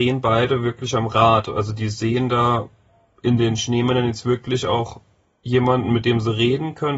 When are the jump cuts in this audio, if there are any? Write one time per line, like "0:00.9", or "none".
none

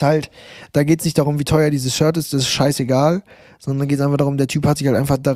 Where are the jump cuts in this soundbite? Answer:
none

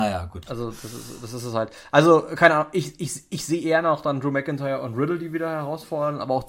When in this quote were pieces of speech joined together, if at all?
none

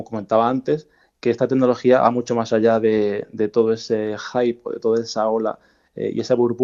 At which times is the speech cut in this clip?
none

